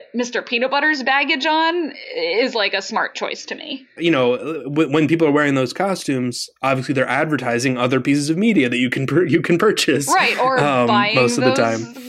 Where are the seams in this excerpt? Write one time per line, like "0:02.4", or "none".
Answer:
0:04.0

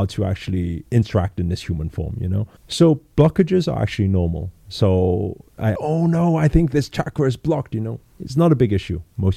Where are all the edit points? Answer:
0:02.6
0:05.7

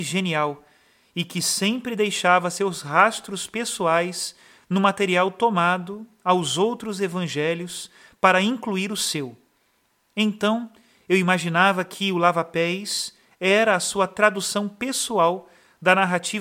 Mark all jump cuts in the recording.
none

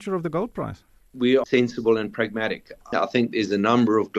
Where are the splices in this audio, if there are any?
0:01.4
0:02.9

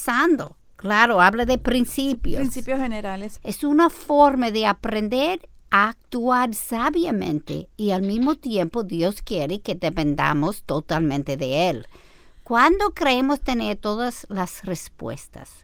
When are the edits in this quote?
0:03.4

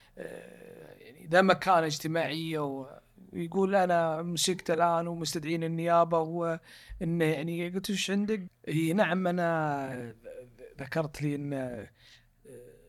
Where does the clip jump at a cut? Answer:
0:08.5

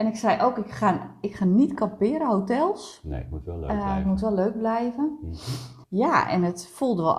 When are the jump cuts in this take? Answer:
0:05.8

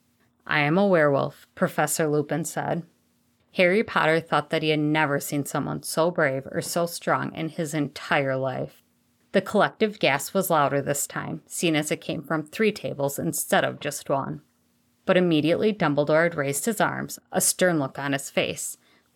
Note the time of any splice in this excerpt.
none

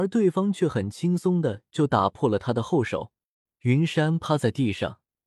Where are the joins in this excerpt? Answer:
0:03.5

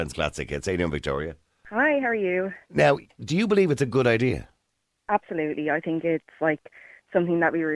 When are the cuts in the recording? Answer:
none

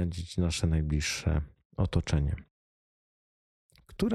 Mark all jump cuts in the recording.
none

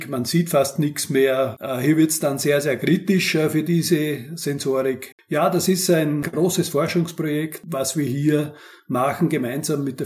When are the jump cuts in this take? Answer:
0:05.1

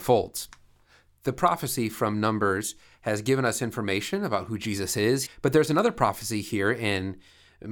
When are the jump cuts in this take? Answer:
0:05.3

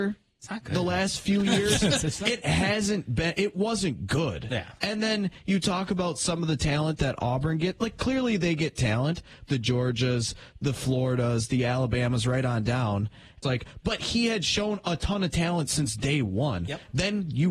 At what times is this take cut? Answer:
0:09.5
0:13.4

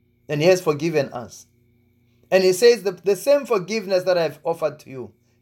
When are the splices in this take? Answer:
none

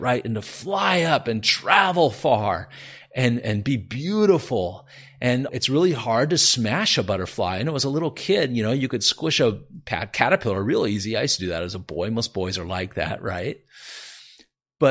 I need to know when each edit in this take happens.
0:05.5

